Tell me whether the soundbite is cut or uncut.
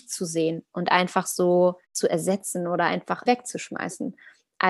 cut